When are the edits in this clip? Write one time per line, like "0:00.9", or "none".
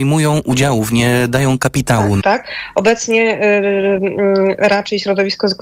0:02.2